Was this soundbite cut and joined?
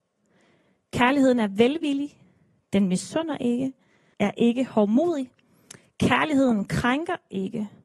yes; 1 cut; at 4.1 s

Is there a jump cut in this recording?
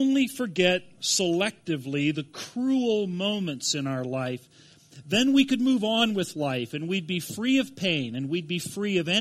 no; 0 cuts

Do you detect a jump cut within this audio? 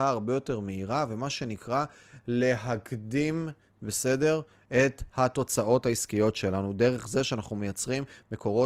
no; 0 cuts

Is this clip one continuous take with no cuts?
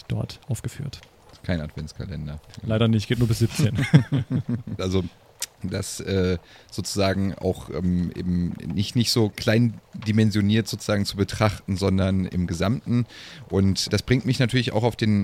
no; 1 cut; at 4.8 s

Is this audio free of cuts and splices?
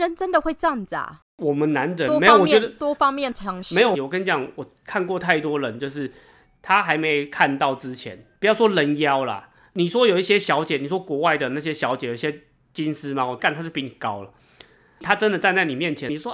no; 1 cut; at 3.9 s

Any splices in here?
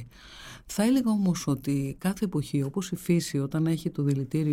no; 0 cuts

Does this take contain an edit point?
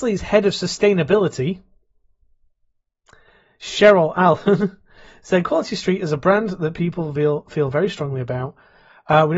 no; 0 cuts

